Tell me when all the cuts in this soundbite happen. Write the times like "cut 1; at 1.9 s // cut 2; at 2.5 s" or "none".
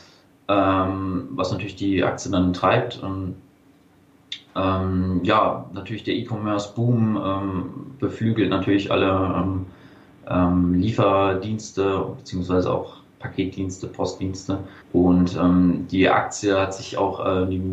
cut 1; at 14.8 s